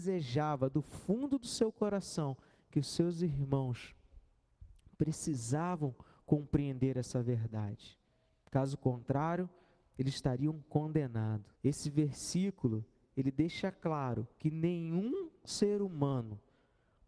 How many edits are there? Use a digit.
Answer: 1